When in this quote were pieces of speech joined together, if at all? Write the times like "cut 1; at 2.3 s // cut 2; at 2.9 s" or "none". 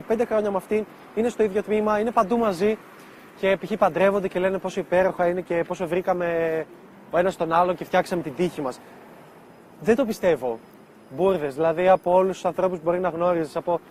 none